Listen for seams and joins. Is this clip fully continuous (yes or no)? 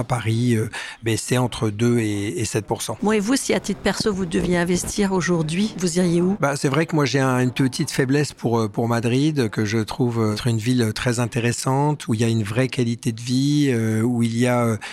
yes